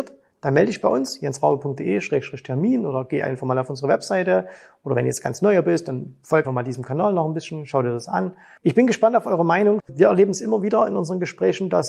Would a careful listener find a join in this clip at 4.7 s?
no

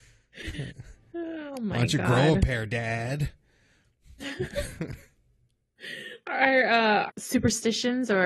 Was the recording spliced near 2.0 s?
no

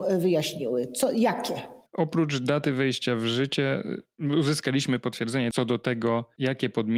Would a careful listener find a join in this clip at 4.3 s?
no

